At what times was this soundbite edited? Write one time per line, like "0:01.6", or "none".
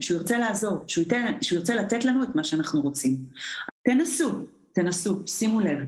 0:03.7